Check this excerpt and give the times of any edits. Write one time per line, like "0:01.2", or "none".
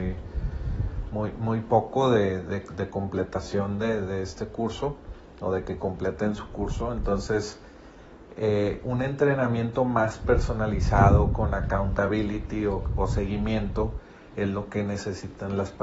none